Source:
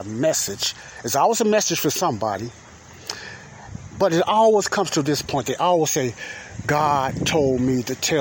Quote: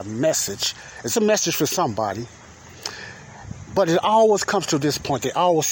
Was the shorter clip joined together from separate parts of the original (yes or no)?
yes